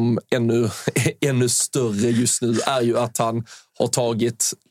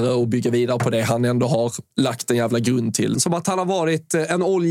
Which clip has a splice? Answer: second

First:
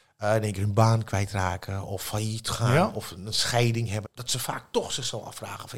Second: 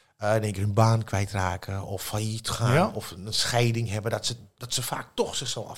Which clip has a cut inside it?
first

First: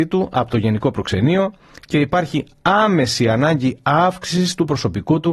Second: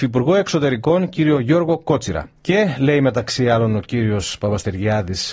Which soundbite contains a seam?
second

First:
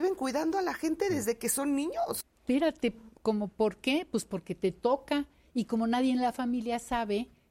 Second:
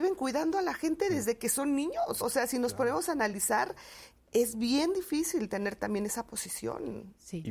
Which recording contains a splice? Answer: first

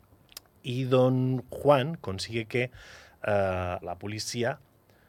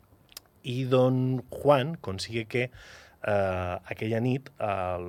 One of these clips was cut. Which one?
first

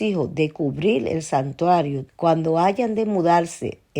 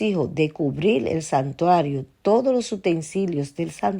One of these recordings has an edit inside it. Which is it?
first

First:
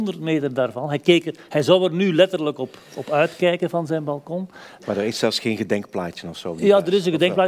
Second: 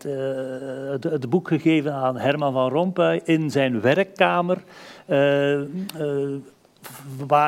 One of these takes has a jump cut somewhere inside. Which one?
first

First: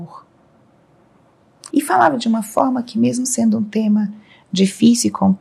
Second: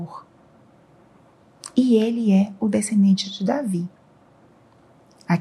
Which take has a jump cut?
first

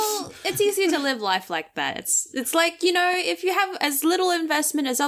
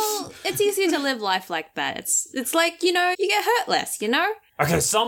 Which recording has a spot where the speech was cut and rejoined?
second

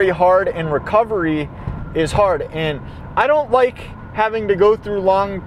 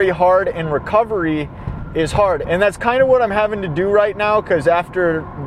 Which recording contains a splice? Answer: second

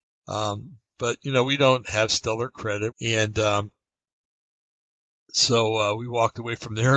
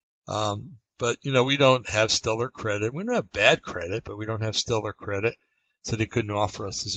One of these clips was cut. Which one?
first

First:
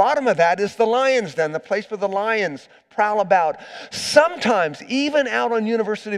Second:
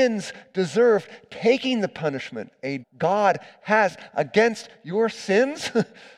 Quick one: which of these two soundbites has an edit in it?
second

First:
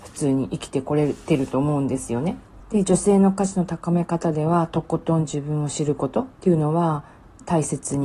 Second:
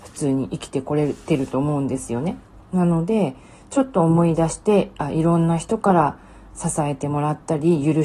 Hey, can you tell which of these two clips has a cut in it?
first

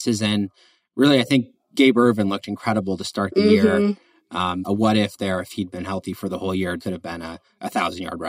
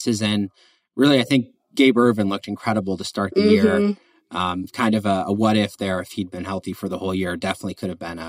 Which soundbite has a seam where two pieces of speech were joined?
first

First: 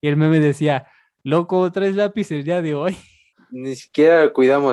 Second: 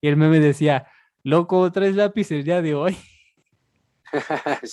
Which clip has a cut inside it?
first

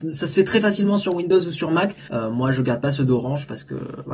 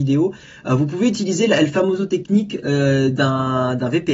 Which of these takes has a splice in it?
first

